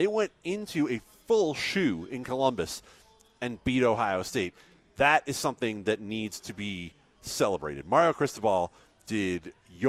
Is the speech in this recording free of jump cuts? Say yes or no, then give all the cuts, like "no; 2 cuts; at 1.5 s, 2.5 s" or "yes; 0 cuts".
yes; 0 cuts